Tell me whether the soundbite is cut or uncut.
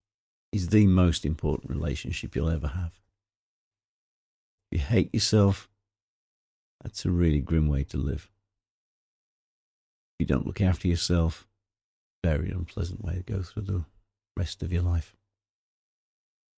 cut